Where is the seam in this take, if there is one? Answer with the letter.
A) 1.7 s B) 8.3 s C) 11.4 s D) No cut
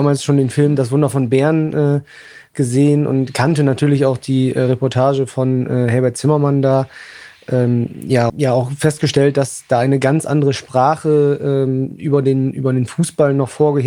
B